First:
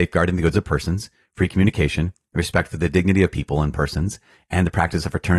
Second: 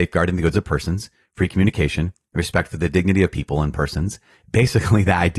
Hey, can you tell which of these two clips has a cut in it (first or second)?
second